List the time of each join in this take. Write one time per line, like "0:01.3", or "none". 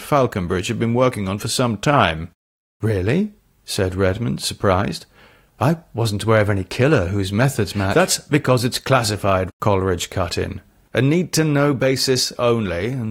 0:09.5